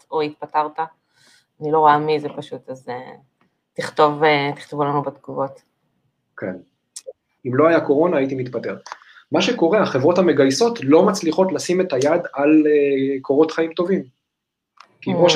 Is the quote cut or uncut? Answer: cut